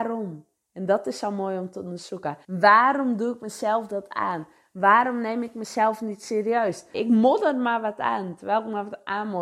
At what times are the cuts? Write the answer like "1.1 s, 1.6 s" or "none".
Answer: 2.4 s, 6.9 s